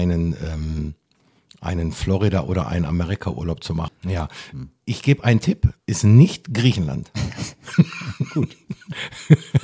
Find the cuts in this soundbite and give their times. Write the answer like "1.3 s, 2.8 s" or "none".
3.9 s, 5.8 s